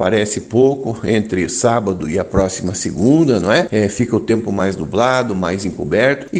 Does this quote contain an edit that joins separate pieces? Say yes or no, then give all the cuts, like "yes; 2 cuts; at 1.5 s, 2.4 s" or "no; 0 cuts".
no; 0 cuts